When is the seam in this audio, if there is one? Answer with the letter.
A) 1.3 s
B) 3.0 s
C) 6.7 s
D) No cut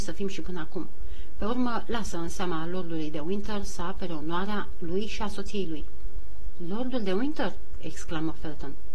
D